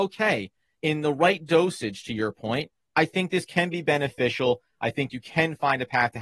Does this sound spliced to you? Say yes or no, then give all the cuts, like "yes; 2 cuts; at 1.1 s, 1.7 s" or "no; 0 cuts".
no; 0 cuts